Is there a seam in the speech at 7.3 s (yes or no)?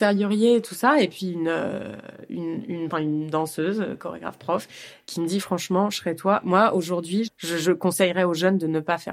yes